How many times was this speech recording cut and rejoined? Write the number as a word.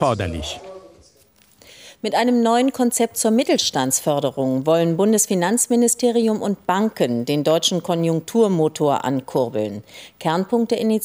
zero